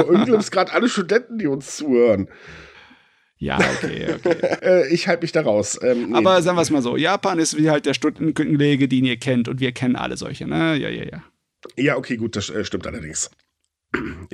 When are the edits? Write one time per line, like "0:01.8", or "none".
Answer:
0:04.6